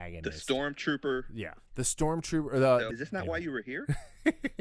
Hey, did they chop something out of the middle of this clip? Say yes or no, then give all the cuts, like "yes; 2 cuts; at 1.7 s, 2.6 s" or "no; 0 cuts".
yes; 2 cuts; at 1.6 s, 2.9 s